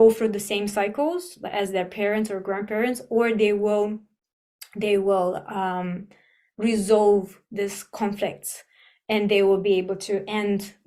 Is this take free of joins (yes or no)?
yes